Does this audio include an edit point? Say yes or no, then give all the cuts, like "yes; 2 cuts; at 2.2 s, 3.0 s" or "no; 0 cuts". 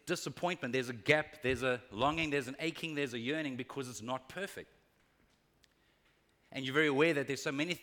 no; 0 cuts